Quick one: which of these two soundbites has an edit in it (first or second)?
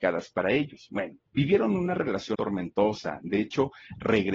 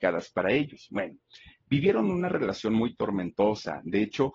first